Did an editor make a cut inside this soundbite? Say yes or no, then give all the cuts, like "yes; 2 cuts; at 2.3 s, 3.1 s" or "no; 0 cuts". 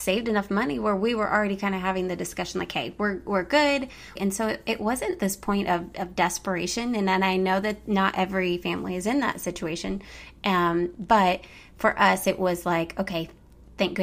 yes; 1 cut; at 4.2 s